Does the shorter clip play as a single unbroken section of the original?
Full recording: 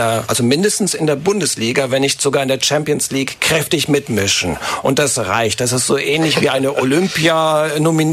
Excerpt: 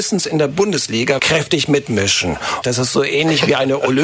no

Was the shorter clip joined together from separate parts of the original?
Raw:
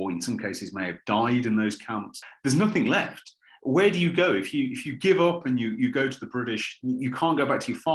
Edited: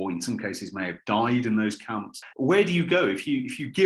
yes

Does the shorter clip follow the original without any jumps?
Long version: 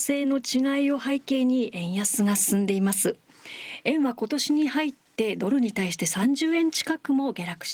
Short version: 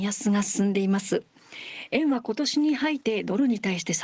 no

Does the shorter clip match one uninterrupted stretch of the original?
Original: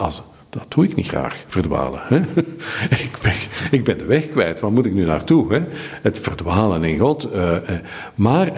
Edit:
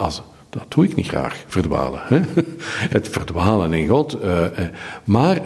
no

